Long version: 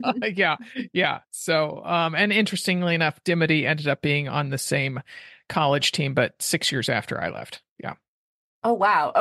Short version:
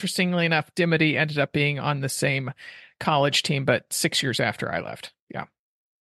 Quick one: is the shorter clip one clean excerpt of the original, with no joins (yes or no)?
yes